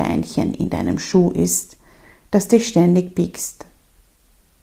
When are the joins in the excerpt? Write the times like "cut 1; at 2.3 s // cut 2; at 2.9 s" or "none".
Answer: none